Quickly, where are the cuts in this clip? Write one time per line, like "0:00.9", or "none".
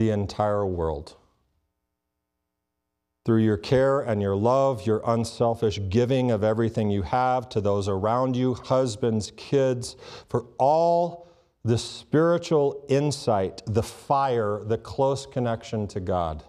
none